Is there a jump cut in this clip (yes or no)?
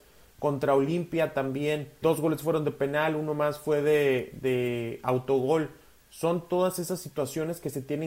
yes